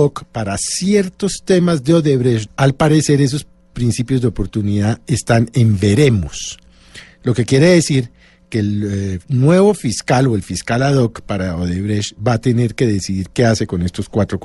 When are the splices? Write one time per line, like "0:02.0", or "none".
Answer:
0:02.5